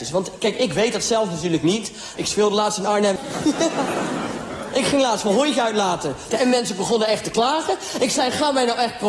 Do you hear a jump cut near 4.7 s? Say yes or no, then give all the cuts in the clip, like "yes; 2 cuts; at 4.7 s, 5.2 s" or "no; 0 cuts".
no; 3 cuts; at 2.2 s, 3.2 s, 6.3 s